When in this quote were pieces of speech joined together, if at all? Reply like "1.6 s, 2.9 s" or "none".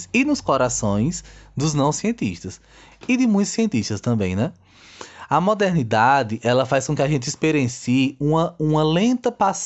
none